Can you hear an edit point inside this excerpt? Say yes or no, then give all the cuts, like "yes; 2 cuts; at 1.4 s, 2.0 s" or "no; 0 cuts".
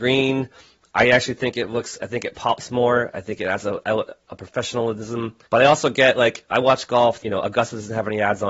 yes; 2 cuts; at 5.4 s, 7.2 s